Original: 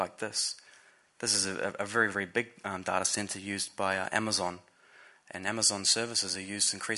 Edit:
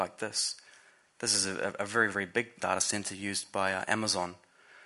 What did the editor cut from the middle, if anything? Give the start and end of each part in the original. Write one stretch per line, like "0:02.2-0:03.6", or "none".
0:02.6-0:02.8